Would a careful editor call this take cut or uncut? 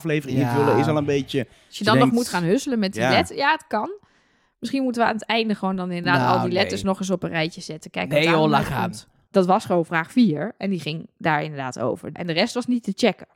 cut